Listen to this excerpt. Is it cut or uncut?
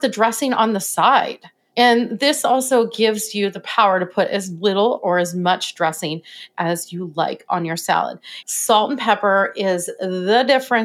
cut